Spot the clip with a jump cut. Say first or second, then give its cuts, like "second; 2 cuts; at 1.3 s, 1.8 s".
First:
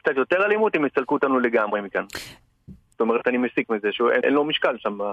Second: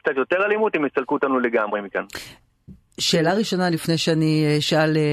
first; 2 cuts; at 2.9 s, 4.2 s